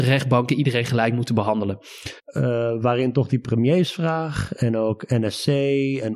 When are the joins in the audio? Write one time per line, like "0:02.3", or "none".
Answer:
0:02.2